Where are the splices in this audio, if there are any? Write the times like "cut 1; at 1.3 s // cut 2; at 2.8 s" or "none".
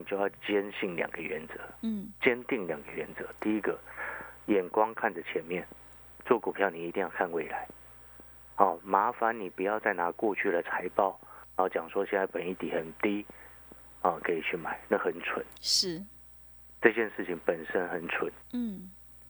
none

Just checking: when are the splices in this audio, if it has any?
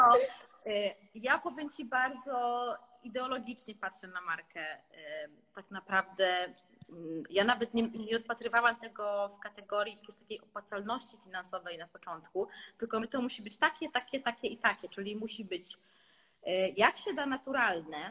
cut 1; at 7.9 s

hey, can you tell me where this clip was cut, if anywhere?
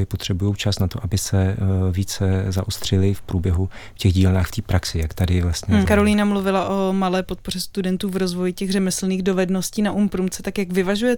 cut 1; at 5.8 s

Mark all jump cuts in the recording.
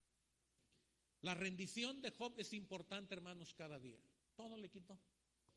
cut 1; at 4.2 s

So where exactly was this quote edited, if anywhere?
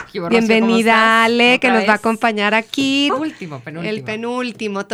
cut 1; at 3.1 s

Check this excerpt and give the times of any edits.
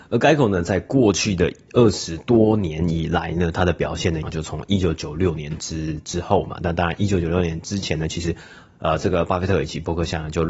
cut 1; at 4.2 s

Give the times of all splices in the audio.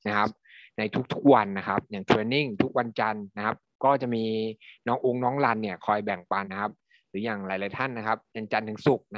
cut 1; at 6.4 s

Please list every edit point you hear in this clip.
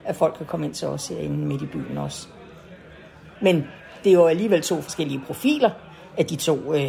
cut 1; at 3.4 s

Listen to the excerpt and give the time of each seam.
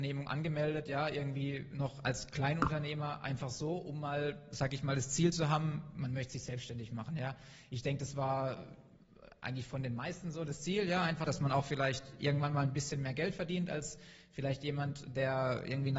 cut 1; at 11.3 s

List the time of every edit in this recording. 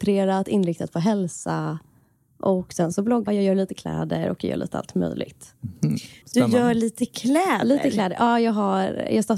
cut 1; at 3.3 s // cut 2; at 6.2 s

